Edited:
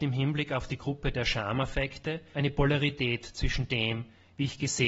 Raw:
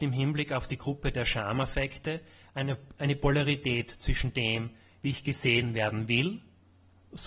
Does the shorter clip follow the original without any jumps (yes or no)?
no